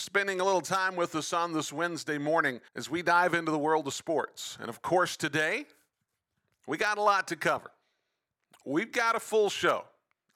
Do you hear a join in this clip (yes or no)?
yes